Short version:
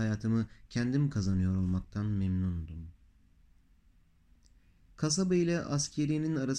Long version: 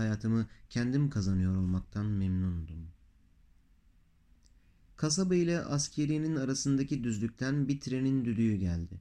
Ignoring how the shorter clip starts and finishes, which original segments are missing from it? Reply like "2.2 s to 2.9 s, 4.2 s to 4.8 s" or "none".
none